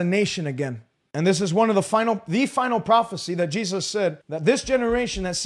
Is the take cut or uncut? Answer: cut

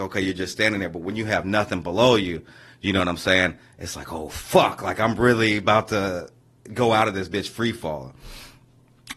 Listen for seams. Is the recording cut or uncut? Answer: uncut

